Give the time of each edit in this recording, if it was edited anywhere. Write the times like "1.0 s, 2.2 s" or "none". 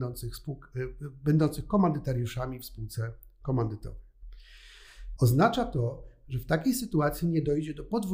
5.2 s